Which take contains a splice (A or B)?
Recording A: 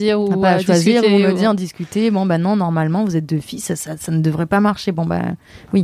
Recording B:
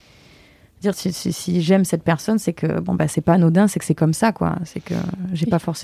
B